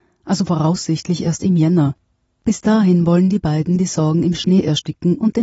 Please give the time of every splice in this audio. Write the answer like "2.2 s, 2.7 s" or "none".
none